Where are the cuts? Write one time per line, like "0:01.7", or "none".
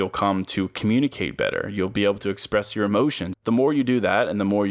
0:03.3

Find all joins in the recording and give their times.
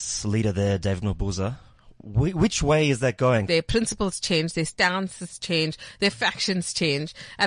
0:03.5

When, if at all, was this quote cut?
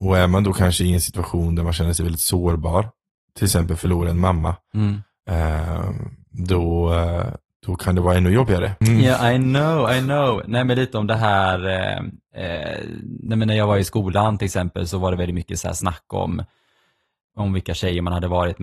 0:08.8

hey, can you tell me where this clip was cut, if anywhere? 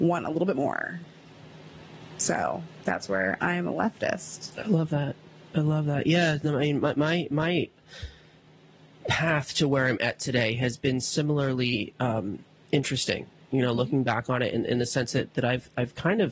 none

